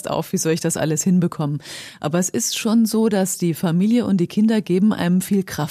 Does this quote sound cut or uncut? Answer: uncut